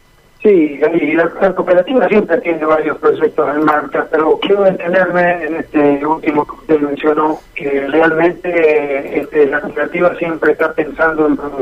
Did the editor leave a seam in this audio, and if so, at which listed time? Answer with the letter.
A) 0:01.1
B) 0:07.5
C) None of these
B